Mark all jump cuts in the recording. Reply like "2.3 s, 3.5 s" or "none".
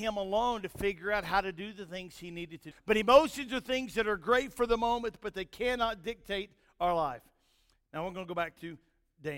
2.7 s